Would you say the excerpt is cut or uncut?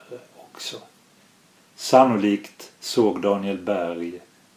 cut